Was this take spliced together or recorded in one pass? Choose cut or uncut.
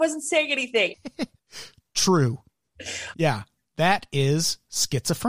cut